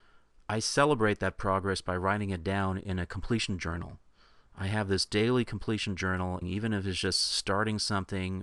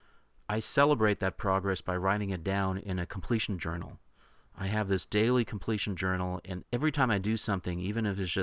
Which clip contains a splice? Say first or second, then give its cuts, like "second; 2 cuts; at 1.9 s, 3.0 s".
first; 1 cut; at 6.4 s